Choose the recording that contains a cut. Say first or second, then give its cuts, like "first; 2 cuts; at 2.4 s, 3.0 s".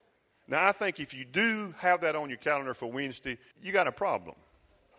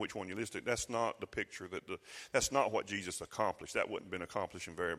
first; 1 cut; at 3.5 s